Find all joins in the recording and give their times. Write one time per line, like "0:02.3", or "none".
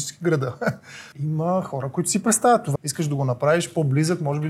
0:01.1
0:02.7